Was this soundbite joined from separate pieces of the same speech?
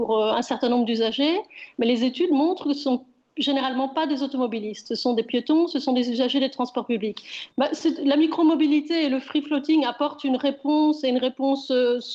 yes; 1 cut; at 7.5 s

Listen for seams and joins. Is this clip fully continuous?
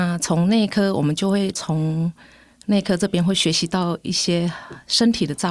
yes; 0 cuts

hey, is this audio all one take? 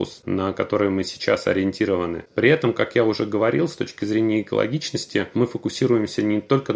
yes; 0 cuts

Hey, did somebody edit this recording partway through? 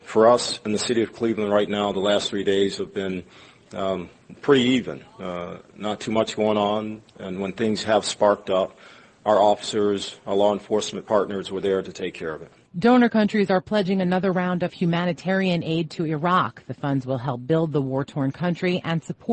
no; 0 cuts

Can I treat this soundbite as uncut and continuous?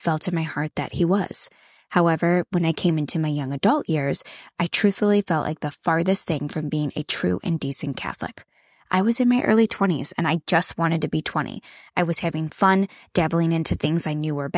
yes; 0 cuts

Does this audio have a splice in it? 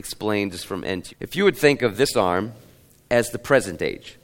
yes; 1 cut; at 1.1 s

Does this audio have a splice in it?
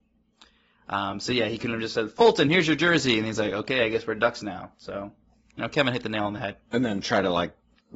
no; 0 cuts

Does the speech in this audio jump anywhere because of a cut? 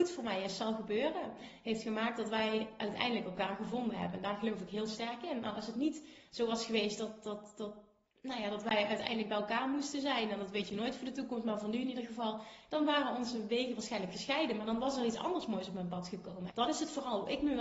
yes; 1 cut; at 16.5 s

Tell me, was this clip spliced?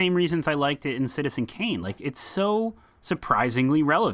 no; 0 cuts

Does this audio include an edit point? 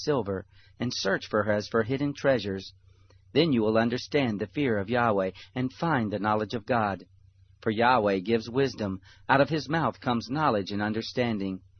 no; 0 cuts

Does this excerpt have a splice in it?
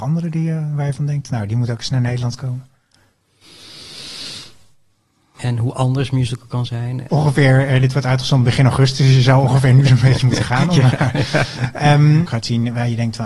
yes; 3 cuts; at 5.4 s, 7.1 s, 12.2 s

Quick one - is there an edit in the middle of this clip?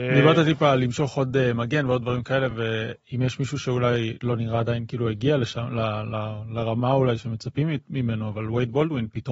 no; 0 cuts

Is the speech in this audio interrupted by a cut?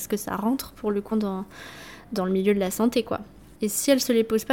yes; 2 cuts; at 1.1 s, 3.5 s

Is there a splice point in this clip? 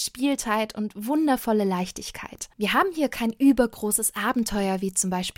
yes; 1 cut; at 2.5 s

